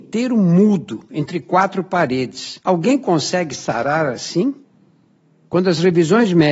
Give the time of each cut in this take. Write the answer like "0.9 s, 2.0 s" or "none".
none

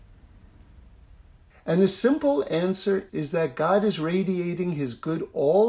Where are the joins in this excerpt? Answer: 1.5 s, 3.1 s

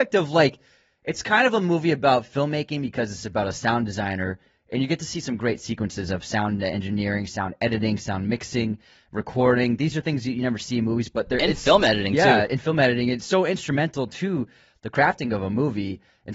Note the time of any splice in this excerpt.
none

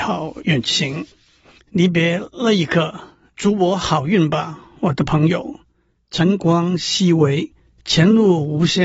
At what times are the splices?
1.6 s

